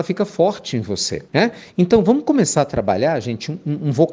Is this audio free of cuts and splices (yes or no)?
no